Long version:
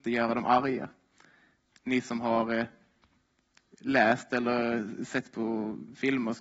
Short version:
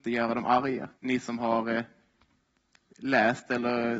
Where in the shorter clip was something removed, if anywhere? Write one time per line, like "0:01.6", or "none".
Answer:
0:01.0